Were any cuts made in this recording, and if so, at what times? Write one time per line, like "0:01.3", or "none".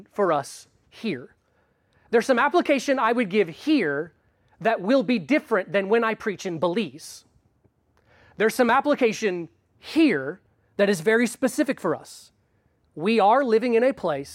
none